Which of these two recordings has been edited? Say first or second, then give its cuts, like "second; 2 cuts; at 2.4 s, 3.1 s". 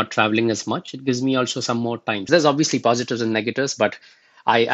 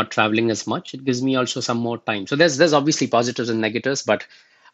first; 1 cut; at 2.3 s